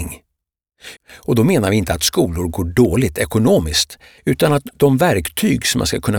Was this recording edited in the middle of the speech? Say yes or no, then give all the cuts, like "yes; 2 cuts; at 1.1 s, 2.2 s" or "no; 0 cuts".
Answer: yes; 2 cuts; at 1.0 s, 4.2 s